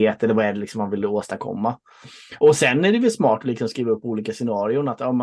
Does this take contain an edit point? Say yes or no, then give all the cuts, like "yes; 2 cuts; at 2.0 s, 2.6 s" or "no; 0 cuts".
no; 0 cuts